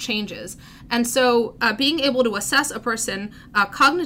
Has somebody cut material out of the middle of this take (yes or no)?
no